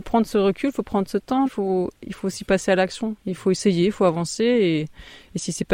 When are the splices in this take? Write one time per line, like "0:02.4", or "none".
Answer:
0:01.4